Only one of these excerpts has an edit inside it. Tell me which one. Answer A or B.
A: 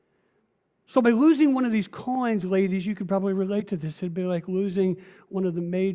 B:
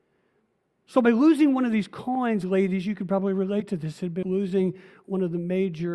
B